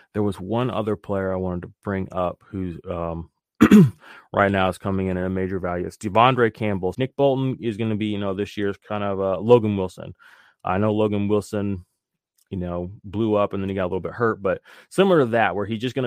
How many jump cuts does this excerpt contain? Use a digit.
1